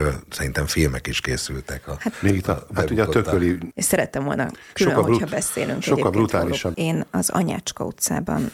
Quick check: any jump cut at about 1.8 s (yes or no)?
no